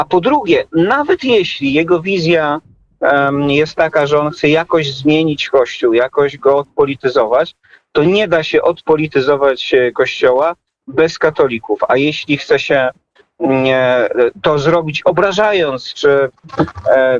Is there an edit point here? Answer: no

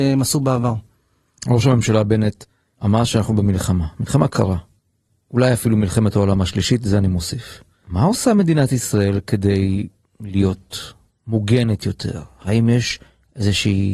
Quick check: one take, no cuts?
yes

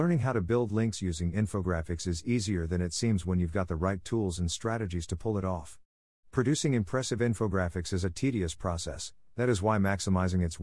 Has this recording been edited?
no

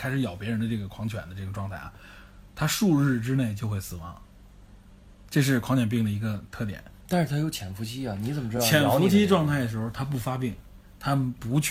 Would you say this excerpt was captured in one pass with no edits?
yes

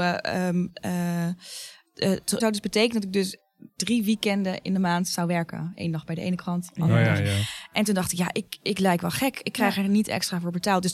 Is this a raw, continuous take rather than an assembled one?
no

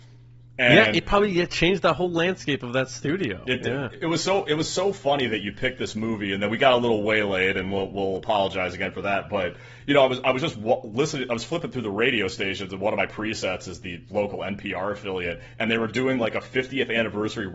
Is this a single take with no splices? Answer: yes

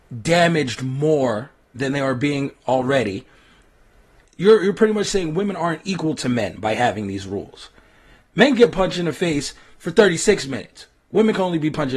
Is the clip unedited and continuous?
yes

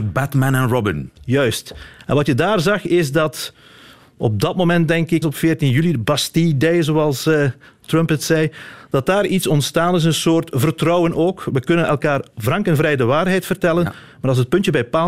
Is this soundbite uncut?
no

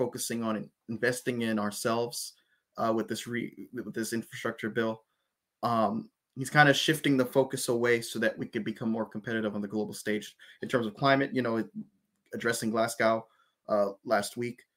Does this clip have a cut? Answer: no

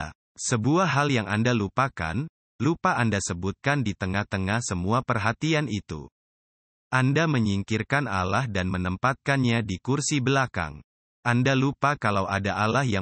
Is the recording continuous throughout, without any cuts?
yes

